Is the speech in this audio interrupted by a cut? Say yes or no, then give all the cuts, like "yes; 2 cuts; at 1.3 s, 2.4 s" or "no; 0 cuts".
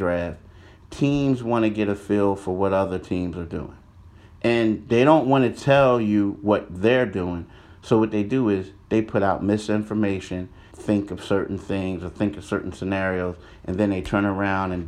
yes; 1 cut; at 10.7 s